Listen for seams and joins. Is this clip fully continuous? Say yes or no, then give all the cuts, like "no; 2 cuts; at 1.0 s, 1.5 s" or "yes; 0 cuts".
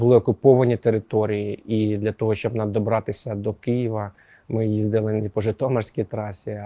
yes; 0 cuts